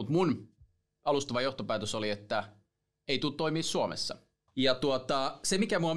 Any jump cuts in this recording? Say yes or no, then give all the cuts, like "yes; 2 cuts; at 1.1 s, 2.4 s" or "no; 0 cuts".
yes; 1 cut; at 4.5 s